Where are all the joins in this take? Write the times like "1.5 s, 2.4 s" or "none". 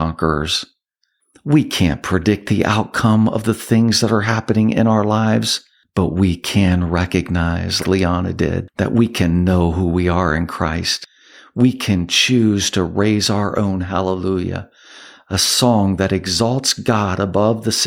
7.8 s